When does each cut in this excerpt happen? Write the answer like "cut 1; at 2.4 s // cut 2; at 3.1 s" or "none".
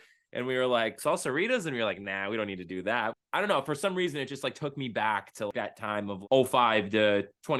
cut 1; at 3.1 s